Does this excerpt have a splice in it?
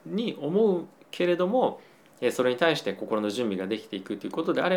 no; 0 cuts

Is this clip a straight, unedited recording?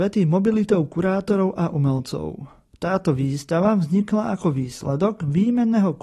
yes; 0 cuts

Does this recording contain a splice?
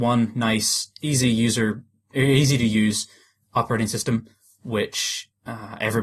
no; 0 cuts

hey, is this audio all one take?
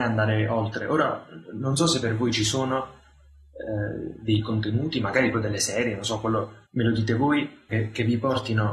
no; 3 cuts; at 5.3 s, 6.6 s, 7.7 s

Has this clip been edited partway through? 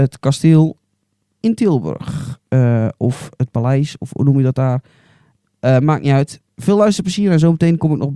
yes; 1 cut; at 6.5 s

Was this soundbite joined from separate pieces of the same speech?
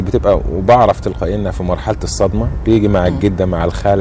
no; 0 cuts

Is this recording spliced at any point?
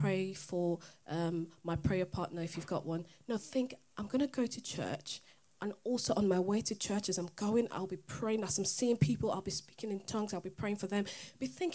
no; 0 cuts

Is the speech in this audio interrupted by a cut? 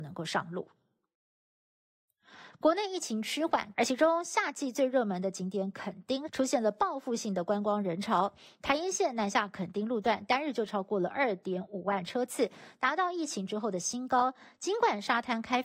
yes; 2 cuts; at 3.7 s, 6.3 s

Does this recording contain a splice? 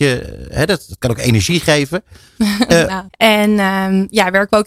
yes; 1 cut; at 3.1 s

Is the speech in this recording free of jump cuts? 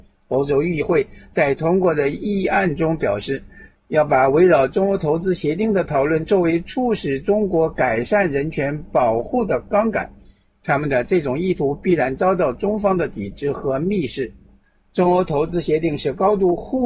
yes; 0 cuts

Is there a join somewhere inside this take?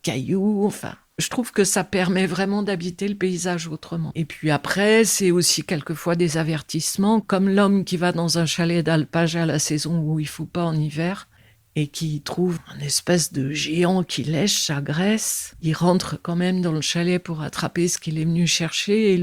no; 0 cuts

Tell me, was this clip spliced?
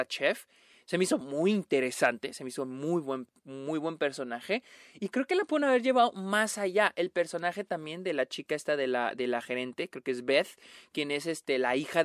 no; 0 cuts

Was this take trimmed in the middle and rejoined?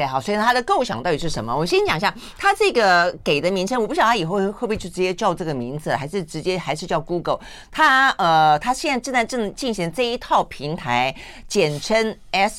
no; 0 cuts

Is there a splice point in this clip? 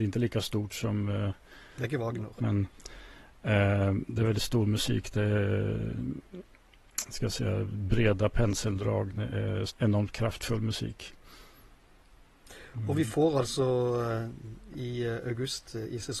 yes; 2 cuts; at 2.4 s, 9.7 s

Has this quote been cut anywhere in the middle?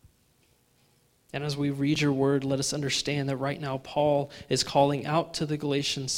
no; 0 cuts

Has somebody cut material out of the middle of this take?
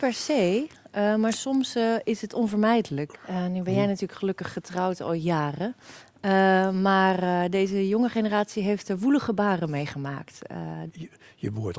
yes; 2 cuts; at 3.1 s, 10.9 s

